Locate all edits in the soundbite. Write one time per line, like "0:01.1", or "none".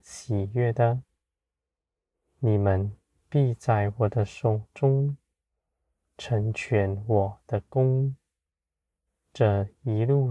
none

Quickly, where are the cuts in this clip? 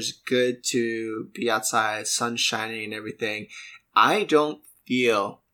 none

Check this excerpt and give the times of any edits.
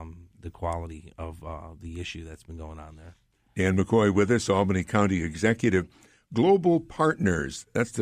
none

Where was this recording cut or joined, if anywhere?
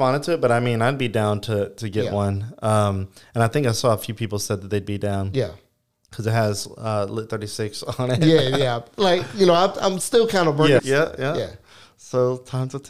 0:10.8

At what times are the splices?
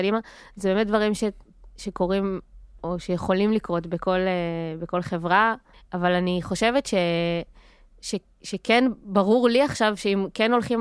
0:05.7

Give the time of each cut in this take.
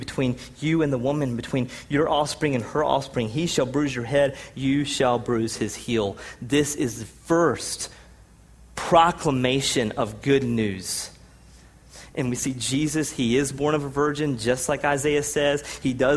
0:12.1

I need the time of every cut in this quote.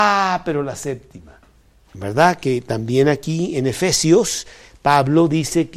0:01.9

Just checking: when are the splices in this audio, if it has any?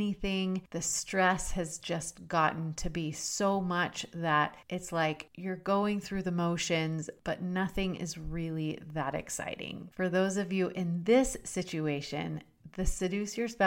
0:09.9

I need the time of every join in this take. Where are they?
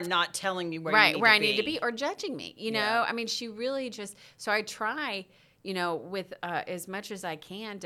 none

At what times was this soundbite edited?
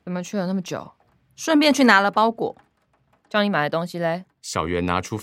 none

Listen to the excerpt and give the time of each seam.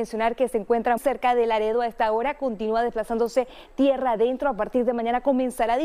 0:01.0

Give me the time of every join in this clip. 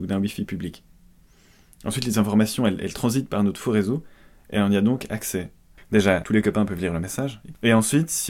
0:05.8

